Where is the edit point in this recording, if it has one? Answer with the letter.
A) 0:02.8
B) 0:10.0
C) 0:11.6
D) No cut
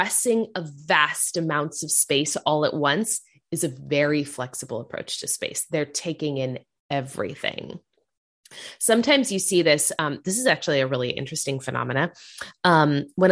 D